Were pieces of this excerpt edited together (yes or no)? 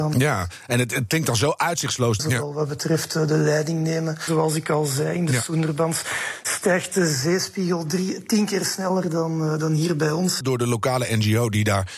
yes